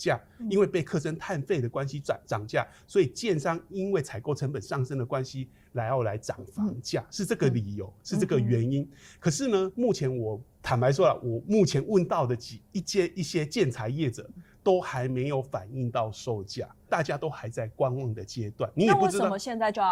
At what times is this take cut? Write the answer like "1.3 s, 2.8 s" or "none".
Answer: 10.5 s, 16.9 s